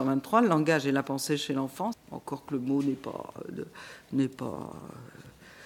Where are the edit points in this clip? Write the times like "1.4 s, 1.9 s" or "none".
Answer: 1.9 s